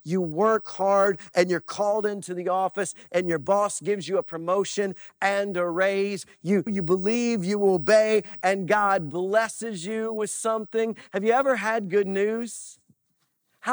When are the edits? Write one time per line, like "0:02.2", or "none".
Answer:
0:06.7